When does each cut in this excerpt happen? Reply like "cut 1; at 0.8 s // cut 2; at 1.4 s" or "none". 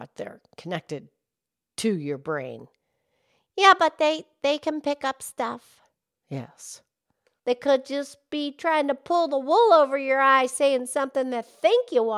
cut 1; at 7.4 s